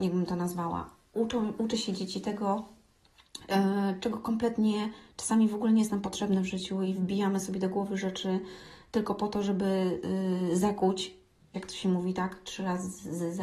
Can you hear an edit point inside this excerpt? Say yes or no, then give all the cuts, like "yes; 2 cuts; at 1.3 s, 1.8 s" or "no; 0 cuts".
yes; 1 cut; at 11.5 s